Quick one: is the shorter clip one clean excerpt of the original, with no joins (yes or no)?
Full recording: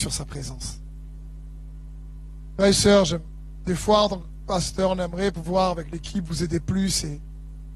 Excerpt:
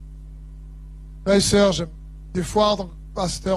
yes